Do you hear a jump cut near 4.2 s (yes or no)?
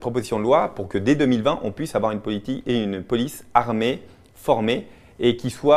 no